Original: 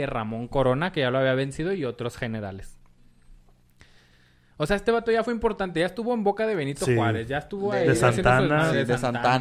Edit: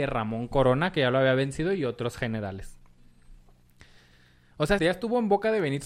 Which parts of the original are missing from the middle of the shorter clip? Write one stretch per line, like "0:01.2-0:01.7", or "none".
0:04.8-0:05.7